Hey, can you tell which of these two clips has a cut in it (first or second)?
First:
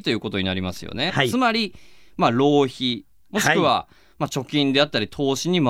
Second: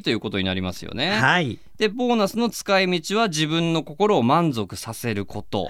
first